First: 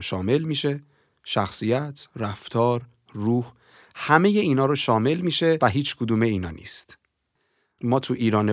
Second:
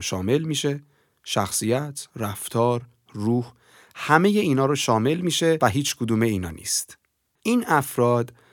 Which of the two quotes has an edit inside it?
second; 1 cut; at 7.4 s

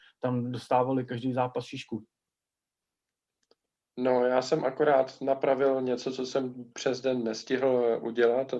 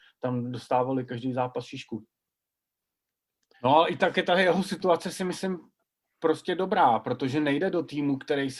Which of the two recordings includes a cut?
second; 1 cut; at 3.5 s

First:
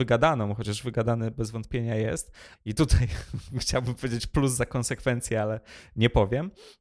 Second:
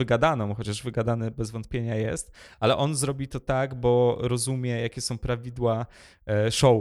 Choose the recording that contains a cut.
first; 1 cut; at 2.5 s

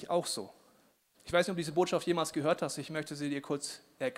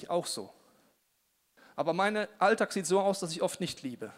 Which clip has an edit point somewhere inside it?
first; 1 cut; at 1.1 s

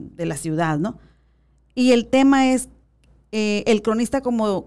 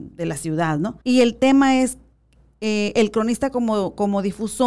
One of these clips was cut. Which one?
second; 1 cut; at 1.0 s

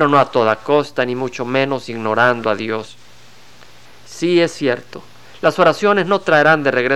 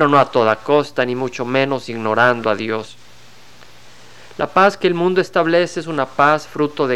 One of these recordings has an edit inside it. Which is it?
first; 1 cut; at 3.9 s

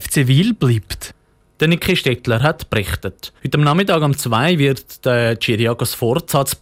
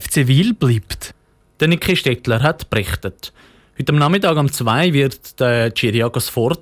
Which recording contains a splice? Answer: first; 1 cut; at 3.4 s

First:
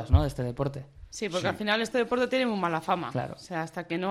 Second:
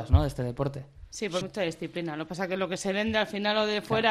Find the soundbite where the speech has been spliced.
second; 1 cut; at 1.4 s

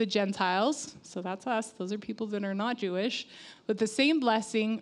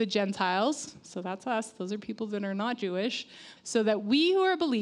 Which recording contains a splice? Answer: second; 1 cut; at 3.6 s

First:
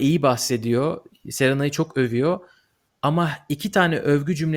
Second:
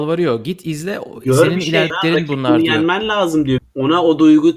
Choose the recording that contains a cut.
second; 2 cuts; at 1.9 s, 3.6 s

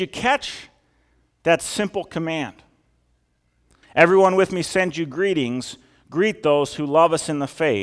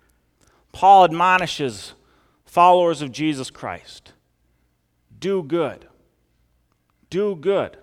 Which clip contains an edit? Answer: first; 1 cut; at 3.8 s

